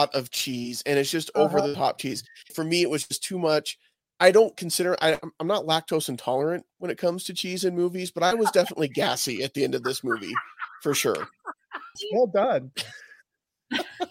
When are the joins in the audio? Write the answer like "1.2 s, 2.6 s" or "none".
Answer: 2.5 s, 12.0 s